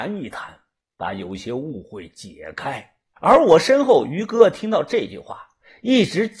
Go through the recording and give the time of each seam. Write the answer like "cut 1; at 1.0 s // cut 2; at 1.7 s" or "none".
cut 1; at 3.2 s